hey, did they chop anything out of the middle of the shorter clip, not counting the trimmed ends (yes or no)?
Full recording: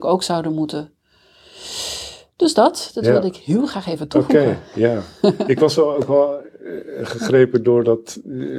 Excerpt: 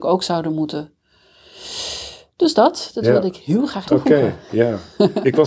yes